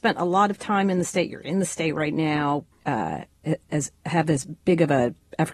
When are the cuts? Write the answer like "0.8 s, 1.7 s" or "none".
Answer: 2.7 s